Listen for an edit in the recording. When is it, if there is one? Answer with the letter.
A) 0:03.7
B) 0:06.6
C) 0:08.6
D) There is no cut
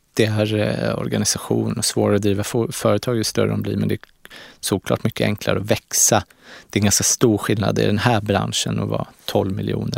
D